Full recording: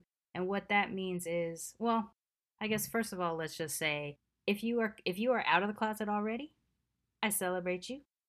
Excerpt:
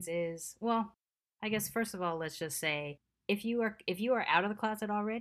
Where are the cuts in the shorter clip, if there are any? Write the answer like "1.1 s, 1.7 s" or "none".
none